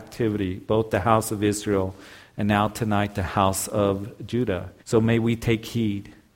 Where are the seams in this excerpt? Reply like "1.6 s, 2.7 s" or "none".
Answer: 4.8 s